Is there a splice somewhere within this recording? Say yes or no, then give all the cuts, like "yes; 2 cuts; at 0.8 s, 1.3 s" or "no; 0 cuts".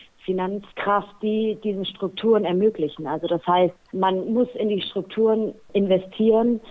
no; 0 cuts